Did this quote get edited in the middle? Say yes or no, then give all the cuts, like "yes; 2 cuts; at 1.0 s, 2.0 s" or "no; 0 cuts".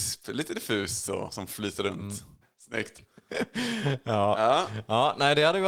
yes; 1 cut; at 2.4 s